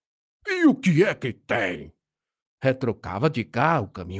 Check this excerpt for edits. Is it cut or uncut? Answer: cut